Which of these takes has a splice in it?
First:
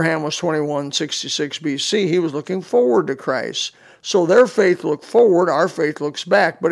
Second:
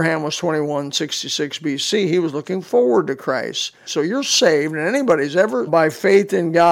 second; 2 cuts; at 3.9 s, 5.7 s

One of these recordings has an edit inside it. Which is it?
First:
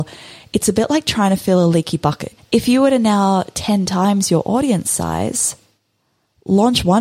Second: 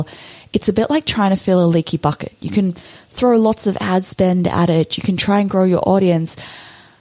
first; 1 cut; at 2.4 s

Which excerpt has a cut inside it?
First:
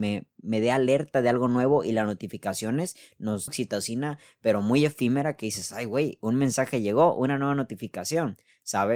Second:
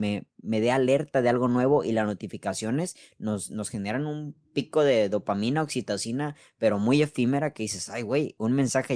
first; 1 cut; at 3.5 s

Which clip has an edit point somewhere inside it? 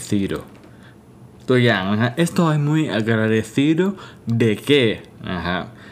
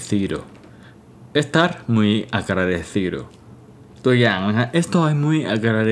first; 1 cut; at 1.3 s

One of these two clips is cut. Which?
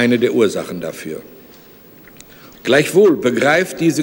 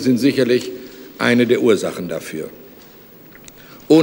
first; 1 cut; at 2.6 s

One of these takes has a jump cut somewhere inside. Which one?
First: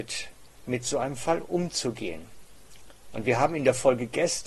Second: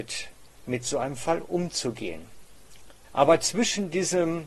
second; 1 cut; at 3.0 s

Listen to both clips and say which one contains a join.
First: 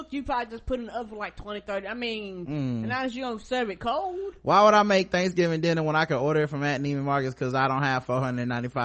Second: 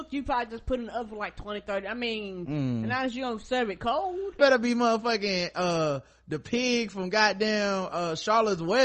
second; 1 cut; at 4.4 s

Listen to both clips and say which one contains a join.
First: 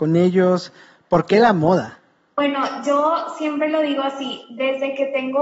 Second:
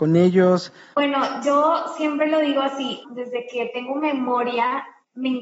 second; 2 cuts; at 0.9 s, 3.0 s

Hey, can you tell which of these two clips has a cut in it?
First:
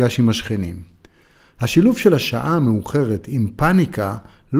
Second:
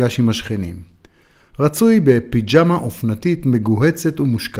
second; 1 cut; at 1.4 s

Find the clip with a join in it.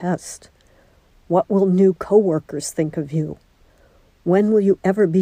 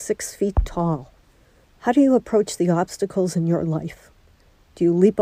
second; 1 cut; at 1.6 s

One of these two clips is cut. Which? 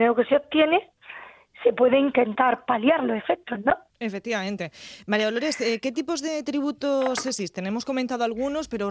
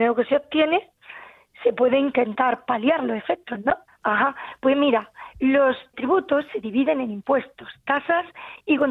second; 2 cuts; at 3.9 s, 5.9 s

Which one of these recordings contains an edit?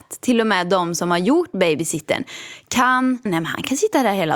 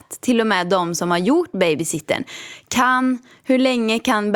first; 1 cut; at 3.3 s

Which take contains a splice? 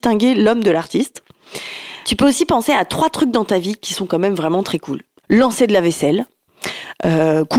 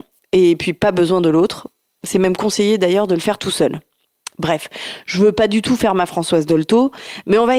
first; 2 cuts; at 2.0 s, 5.2 s

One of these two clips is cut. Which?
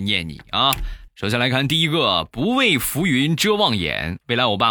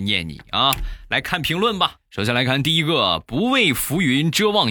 first; 1 cut; at 1.1 s

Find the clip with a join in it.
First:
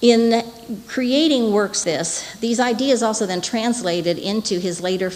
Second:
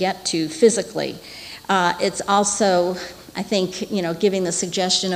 first; 1 cut; at 1.8 s

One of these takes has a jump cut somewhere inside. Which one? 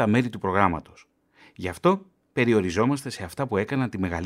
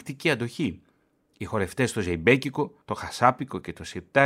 second; 2 cuts; at 1.2 s, 2.8 s

